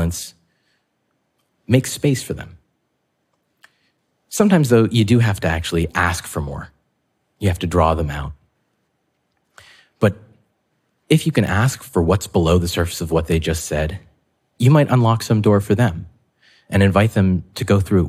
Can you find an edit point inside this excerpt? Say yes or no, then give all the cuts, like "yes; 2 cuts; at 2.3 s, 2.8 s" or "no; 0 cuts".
no; 0 cuts